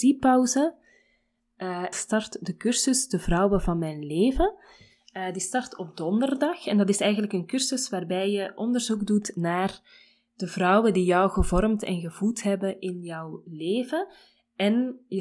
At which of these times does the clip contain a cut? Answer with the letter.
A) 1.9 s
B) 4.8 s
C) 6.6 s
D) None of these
A